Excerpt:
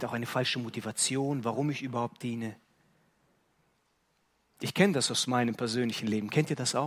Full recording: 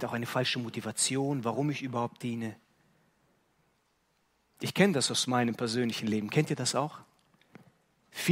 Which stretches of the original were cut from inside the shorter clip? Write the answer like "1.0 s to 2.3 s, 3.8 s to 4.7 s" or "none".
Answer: none